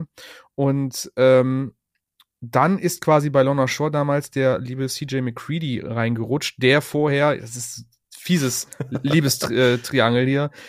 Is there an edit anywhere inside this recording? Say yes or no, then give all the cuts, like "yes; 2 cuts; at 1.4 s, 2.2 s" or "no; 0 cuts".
no; 0 cuts